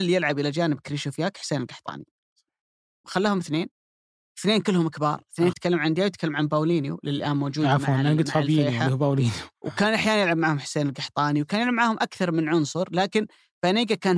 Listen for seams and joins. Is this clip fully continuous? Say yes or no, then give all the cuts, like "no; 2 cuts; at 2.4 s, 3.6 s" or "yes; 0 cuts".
no; 2 cuts; at 3.0 s, 5.5 s